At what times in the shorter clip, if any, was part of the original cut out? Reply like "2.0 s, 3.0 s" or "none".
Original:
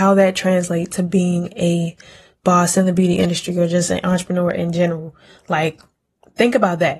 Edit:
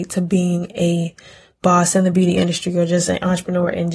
none